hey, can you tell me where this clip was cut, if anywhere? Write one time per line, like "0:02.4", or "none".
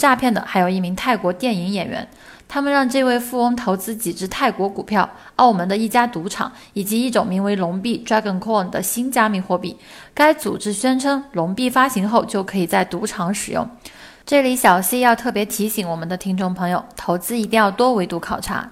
none